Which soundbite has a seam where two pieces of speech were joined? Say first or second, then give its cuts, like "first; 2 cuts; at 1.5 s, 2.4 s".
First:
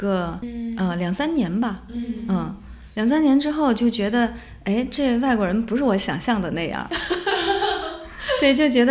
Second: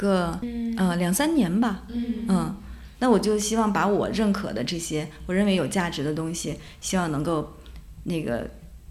second; 1 cut; at 2.9 s